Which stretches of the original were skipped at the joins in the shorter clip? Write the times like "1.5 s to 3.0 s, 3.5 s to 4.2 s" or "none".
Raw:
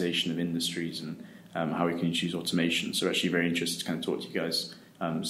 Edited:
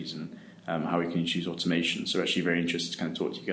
none